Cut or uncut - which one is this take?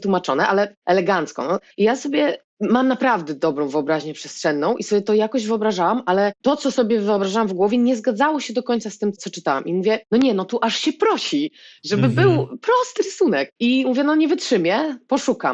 cut